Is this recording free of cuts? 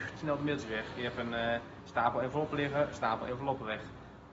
yes; 0 cuts

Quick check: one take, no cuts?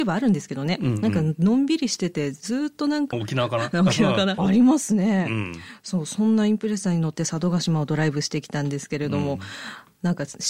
no; 2 cuts; at 3.1 s, 4.4 s

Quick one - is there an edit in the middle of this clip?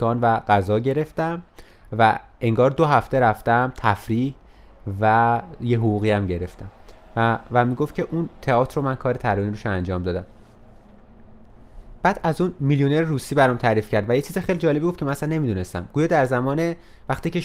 no; 0 cuts

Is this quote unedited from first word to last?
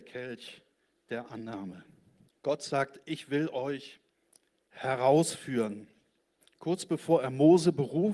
no; 1 cut; at 2.3 s

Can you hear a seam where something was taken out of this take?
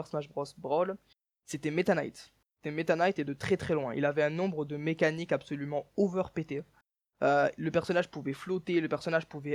no; 0 cuts

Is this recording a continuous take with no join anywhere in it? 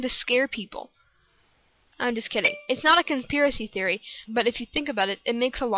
no; 2 cuts; at 1.9 s, 4.2 s

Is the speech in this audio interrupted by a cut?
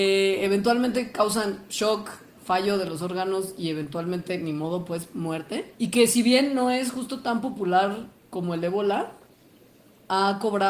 yes; 1 cut; at 5.7 s

